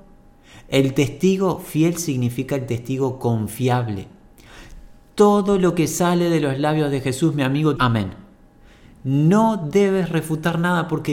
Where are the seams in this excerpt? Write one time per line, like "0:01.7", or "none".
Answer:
0:07.8